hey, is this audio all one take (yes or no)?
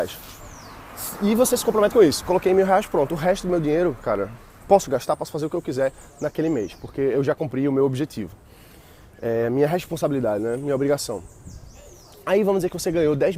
yes